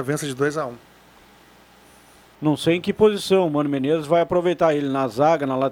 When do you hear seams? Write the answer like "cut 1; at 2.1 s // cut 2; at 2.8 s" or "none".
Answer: cut 1; at 2.4 s